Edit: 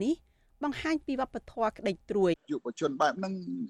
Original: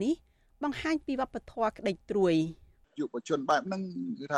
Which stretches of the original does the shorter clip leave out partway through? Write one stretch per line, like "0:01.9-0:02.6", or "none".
0:02.3-0:02.8